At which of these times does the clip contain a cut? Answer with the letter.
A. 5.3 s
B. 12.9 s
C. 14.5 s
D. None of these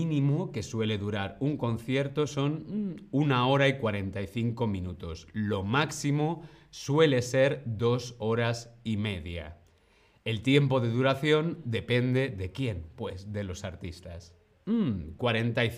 C